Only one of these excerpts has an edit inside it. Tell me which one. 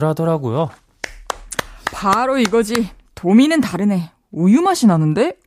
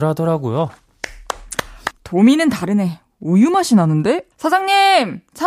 second; 2 cuts; at 1.9 s, 4.3 s

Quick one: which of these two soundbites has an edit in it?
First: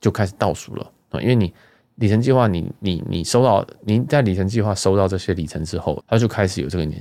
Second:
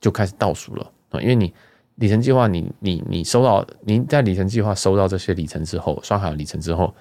first; 1 cut; at 6.0 s

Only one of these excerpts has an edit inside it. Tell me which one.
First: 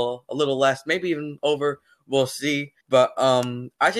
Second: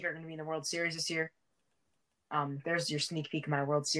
first; 1 cut; at 2.8 s

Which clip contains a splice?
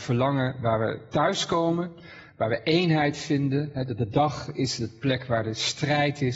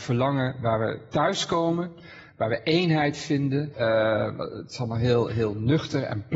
second; 2 cuts; at 3.7 s, 5.3 s

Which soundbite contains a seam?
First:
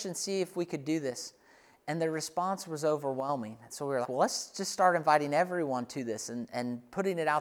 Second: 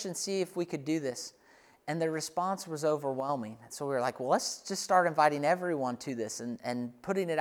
first; 1 cut; at 4.0 s

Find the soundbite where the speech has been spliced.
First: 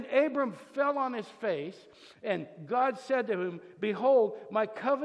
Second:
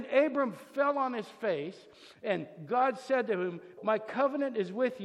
second; 1 cut; at 3.8 s

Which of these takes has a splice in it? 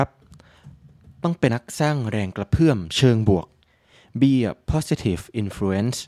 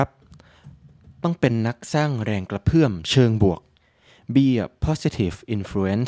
first; 1 cut; at 1.5 s

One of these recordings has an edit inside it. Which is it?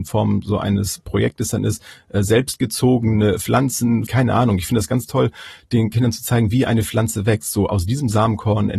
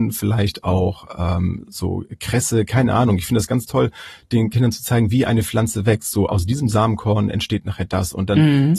first; 1 cut; at 4.1 s

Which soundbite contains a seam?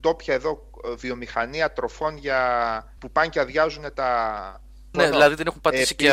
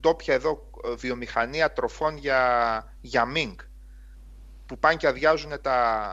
first; 2 cuts; at 3.0 s, 4.9 s

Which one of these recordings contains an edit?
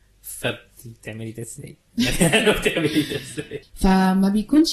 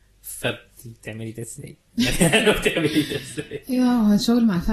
first; 1 cut; at 3.6 s

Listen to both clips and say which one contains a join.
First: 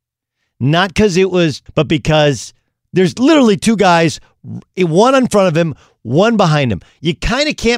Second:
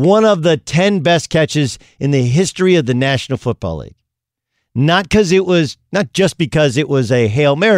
first; 1 cut; at 1.7 s

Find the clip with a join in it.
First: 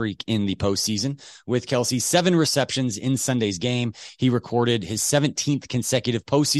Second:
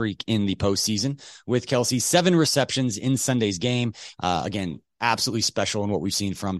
second; 1 cut; at 4.1 s

